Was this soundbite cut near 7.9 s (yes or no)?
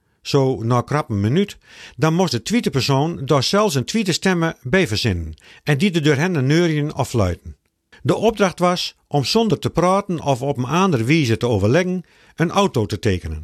yes